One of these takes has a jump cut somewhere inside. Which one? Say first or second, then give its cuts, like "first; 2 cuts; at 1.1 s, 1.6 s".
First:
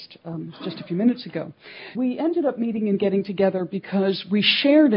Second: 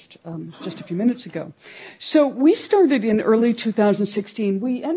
first; 1 cut; at 1.9 s